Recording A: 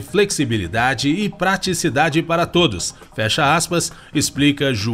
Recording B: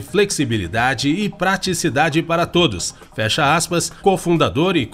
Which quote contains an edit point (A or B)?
B